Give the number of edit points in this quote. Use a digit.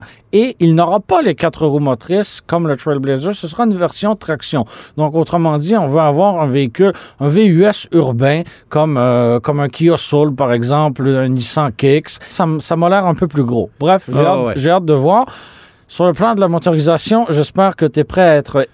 1